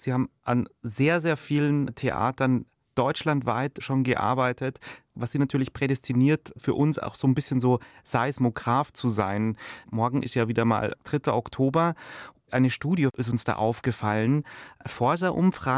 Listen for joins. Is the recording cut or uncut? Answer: cut